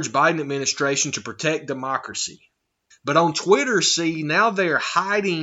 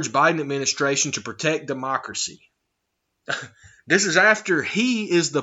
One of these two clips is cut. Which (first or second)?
first